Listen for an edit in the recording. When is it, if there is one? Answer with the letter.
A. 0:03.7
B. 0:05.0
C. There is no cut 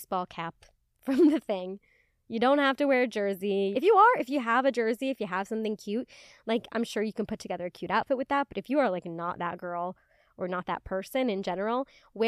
A